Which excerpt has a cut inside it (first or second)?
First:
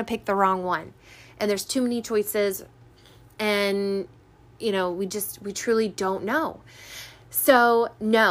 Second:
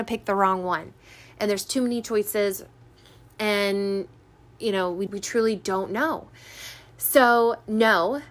second